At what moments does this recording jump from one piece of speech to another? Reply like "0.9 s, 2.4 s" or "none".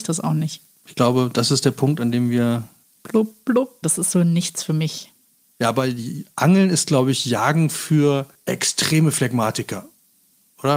3.8 s